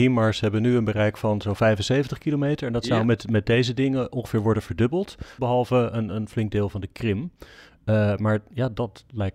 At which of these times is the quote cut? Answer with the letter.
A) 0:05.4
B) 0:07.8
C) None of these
A